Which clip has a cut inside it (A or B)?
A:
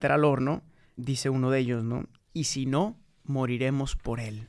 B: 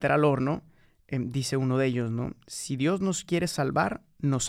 A